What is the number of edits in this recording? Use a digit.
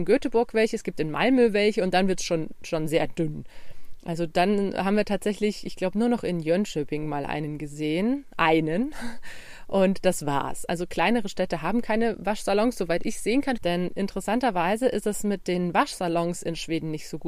1